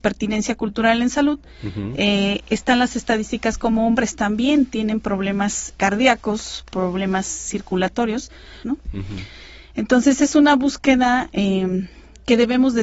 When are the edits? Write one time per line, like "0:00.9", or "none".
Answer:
0:05.7
0:08.6